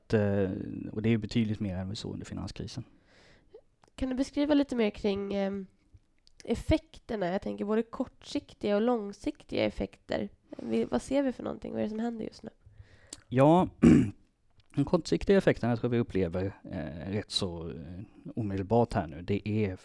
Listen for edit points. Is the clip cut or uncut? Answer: uncut